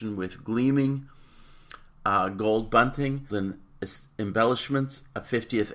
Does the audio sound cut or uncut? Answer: cut